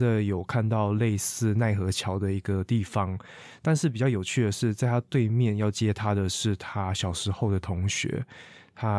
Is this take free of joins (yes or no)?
yes